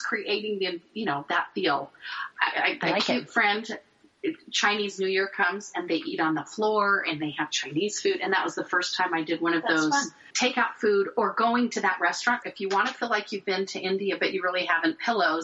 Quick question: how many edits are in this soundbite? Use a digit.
2